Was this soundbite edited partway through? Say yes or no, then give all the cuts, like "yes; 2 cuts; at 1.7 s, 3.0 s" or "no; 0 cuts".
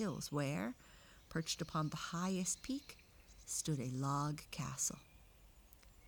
no; 0 cuts